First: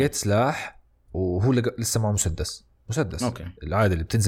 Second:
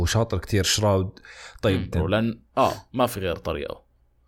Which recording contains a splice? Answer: second; 1 cut; at 1.9 s

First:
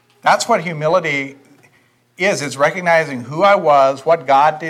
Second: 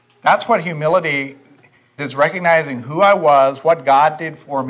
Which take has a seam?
second; 1 cut; at 2.0 s

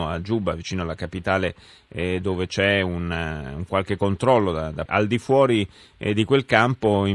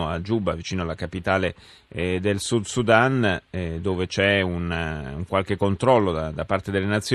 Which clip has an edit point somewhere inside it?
first; 2 cuts; at 2.2 s, 4.9 s

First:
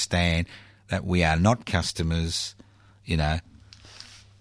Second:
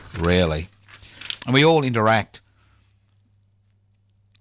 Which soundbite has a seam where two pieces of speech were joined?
second; 1 cut; at 1.4 s

